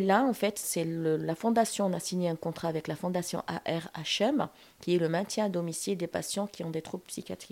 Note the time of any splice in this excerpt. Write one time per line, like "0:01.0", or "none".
none